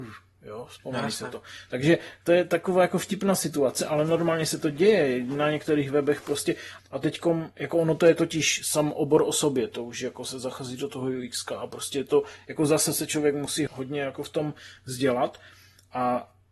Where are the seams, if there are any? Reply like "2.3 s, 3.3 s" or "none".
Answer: 6.8 s, 13.7 s